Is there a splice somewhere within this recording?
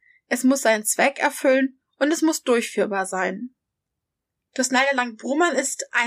no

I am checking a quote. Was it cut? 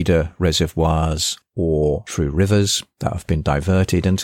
no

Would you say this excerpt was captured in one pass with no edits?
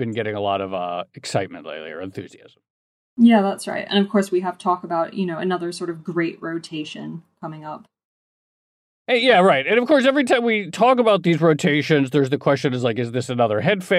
yes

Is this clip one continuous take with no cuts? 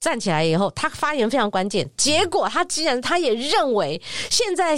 yes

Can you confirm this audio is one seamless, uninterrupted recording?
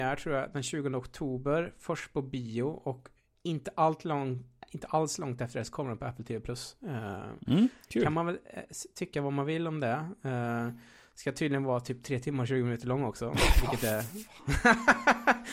yes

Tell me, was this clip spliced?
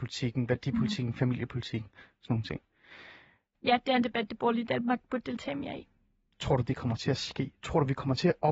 yes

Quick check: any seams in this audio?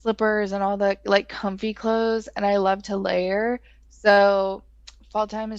no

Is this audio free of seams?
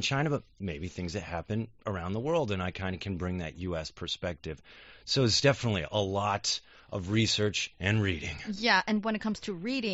yes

